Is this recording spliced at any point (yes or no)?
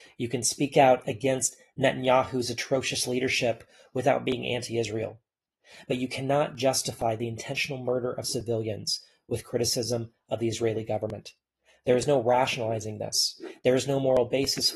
no